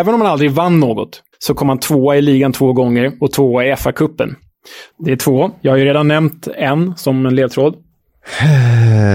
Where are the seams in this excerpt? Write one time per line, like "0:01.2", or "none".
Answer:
0:01.3
0:04.9